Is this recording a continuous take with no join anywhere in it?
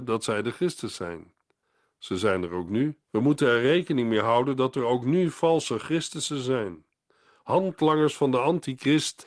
no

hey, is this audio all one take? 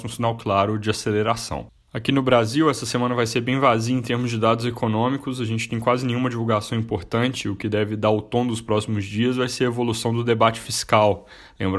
yes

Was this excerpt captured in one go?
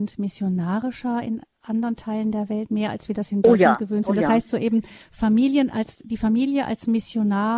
yes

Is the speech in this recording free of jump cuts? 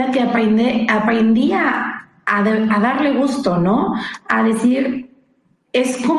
yes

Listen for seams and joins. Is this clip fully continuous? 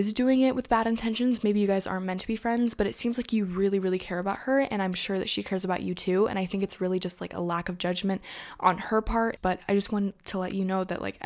no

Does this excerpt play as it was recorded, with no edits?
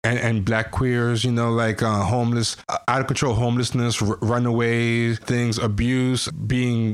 no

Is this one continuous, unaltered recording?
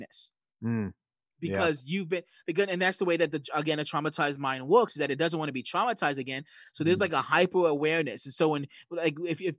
yes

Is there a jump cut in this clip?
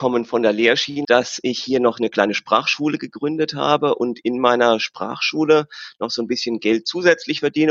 yes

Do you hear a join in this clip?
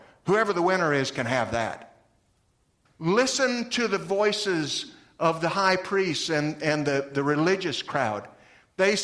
yes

